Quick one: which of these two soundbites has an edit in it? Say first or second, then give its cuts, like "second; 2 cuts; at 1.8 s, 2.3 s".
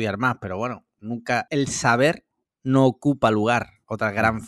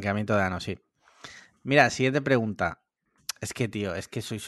first; 1 cut; at 1.5 s